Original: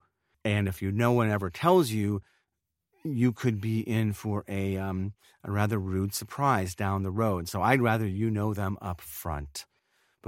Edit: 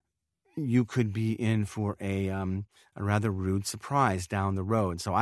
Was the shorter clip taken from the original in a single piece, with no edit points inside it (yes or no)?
yes